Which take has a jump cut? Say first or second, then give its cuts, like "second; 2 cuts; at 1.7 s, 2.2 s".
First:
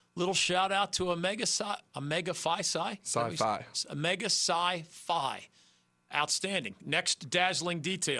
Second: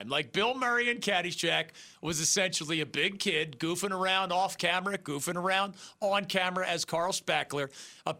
first; 1 cut; at 1.9 s